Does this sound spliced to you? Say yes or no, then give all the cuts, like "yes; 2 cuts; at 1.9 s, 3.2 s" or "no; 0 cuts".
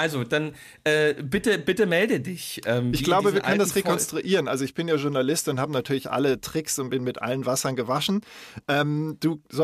no; 0 cuts